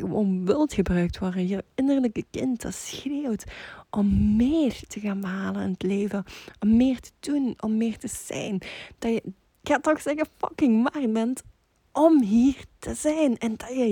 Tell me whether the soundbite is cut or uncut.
cut